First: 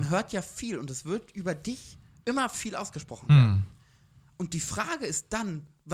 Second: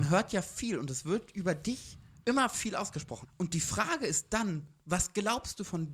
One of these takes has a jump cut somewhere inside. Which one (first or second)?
second